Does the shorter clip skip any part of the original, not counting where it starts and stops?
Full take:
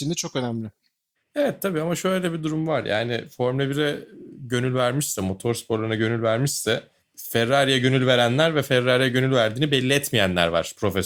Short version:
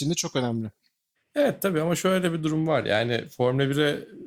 no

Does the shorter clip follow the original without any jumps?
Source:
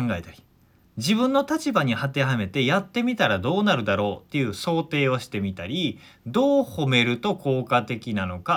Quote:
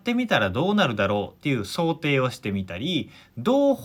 yes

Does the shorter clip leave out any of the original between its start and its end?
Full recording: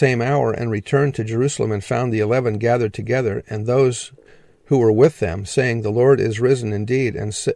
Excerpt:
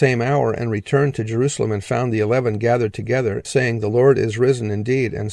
yes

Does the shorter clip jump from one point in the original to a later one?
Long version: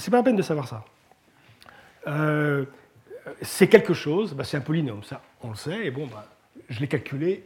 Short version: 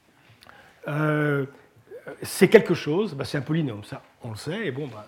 no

